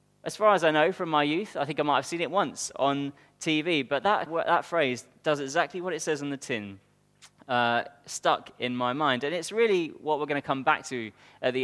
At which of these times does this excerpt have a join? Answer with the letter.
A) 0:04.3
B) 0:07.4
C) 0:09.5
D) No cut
A